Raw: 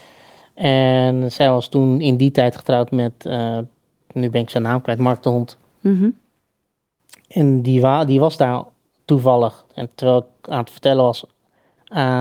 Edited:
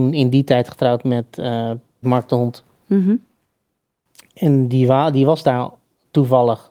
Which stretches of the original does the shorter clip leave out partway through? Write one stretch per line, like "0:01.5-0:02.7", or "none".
0:03.9-0:05.0